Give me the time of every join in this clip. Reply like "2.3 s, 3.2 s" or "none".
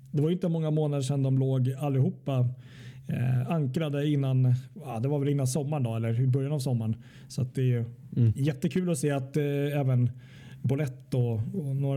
none